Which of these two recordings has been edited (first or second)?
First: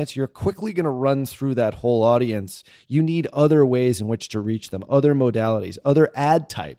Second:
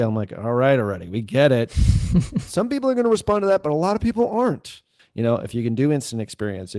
second